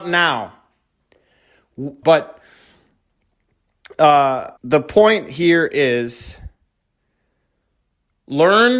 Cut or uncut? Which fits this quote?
cut